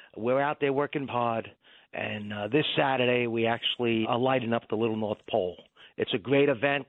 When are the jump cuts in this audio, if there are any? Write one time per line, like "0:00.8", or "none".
0:01.1
0:04.0